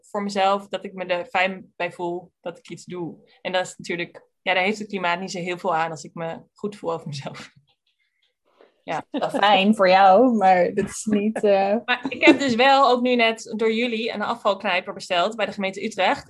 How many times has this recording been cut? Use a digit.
0